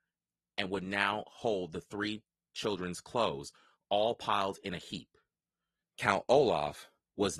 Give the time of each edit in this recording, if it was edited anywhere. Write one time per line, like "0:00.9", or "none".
0:05.8